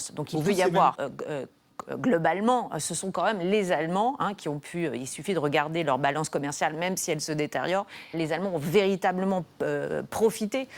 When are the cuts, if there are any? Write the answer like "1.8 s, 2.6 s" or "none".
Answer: 0.9 s, 8.1 s